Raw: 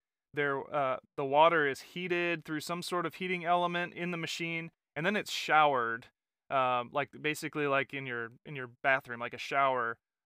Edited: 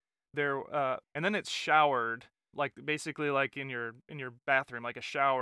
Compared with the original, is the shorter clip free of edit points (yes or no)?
no